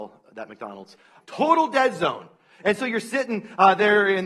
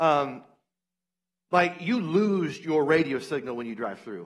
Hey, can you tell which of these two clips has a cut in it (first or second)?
first